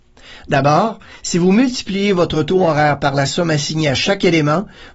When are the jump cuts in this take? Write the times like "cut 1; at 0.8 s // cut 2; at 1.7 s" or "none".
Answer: none